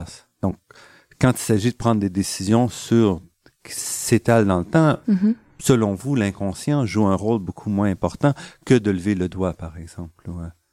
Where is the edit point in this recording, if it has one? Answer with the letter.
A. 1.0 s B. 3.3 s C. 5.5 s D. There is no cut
D